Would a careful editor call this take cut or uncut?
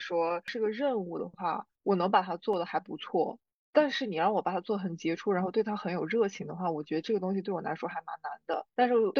uncut